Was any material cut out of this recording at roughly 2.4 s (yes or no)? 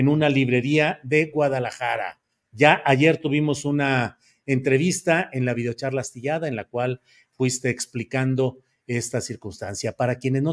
no